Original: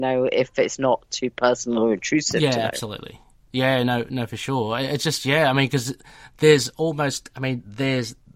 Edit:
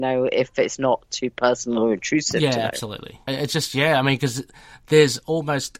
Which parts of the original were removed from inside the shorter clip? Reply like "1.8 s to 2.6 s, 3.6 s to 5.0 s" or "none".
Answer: 3.3 s to 4.8 s